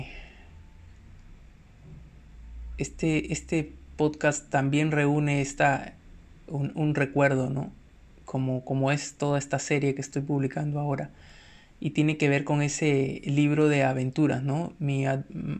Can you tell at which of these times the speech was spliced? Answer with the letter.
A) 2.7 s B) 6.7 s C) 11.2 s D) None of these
D